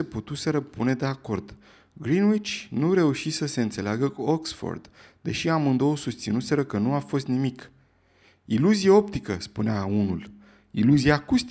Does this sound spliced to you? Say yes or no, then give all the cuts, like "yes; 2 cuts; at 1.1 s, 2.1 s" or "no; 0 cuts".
no; 0 cuts